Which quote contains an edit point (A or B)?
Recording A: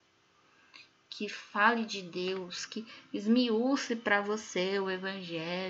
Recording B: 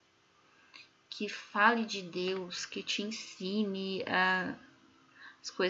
A